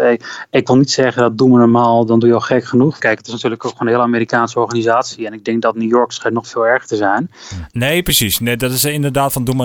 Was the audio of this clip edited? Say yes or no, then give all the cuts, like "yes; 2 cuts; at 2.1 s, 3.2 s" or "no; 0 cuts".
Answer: yes; 2 cuts; at 3.0 s, 7.7 s